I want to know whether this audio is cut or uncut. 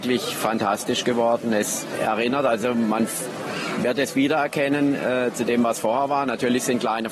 uncut